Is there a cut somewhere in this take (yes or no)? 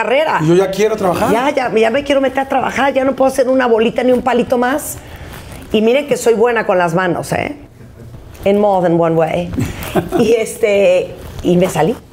no